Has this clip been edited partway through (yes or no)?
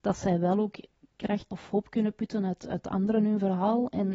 yes